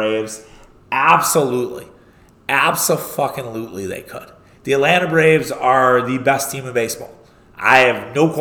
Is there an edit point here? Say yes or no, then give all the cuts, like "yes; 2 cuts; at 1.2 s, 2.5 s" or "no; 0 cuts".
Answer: no; 0 cuts